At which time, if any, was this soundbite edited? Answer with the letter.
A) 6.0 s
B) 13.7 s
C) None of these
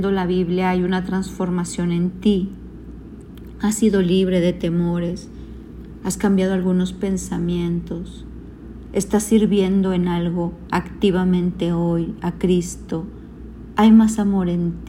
B